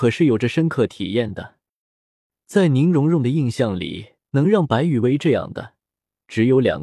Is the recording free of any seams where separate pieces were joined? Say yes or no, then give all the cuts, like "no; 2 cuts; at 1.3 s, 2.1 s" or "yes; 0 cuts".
no; 1 cut; at 4.2 s